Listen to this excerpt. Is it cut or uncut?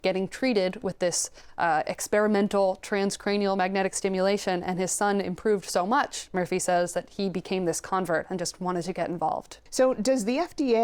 cut